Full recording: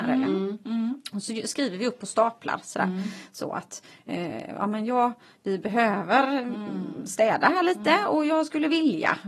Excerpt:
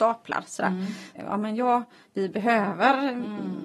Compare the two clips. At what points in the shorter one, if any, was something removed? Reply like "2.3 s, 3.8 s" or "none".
1.2 s